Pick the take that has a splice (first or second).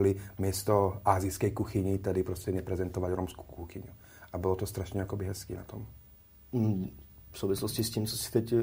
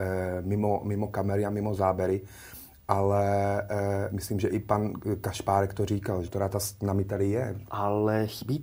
second